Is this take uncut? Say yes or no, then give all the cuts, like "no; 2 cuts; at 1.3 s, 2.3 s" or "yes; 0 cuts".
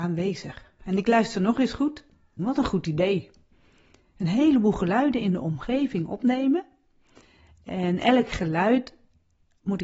no; 1 cut; at 2.4 s